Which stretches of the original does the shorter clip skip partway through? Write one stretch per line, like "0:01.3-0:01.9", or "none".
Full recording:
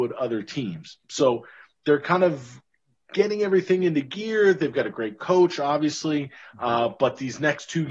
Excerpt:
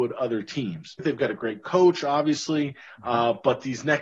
0:01.0-0:04.5